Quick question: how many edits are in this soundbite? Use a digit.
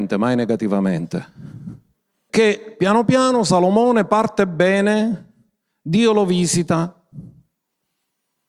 1